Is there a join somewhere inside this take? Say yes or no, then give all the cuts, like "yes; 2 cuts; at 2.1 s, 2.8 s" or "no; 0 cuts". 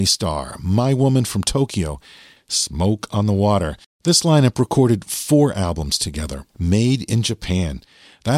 yes; 3 cuts; at 2.4 s, 3.8 s, 6.5 s